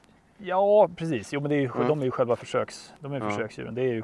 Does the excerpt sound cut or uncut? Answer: uncut